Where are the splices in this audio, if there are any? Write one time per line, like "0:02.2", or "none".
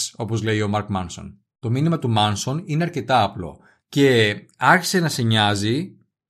0:03.8